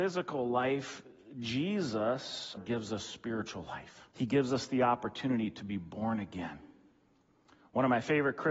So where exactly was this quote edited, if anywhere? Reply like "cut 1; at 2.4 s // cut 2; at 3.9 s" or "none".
cut 1; at 2.6 s // cut 2; at 4.1 s